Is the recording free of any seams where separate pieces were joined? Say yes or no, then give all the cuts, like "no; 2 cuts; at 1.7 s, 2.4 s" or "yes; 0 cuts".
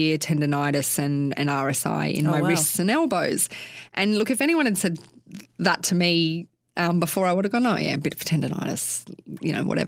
yes; 0 cuts